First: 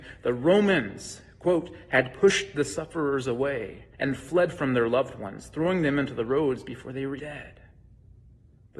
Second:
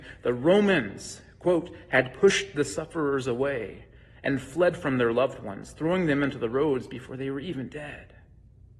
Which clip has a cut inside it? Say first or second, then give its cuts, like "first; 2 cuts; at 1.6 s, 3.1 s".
first; 2 cuts; at 3.9 s, 7.2 s